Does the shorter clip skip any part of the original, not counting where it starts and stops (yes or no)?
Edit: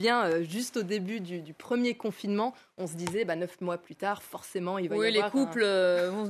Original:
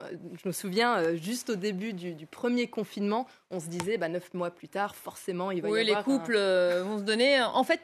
no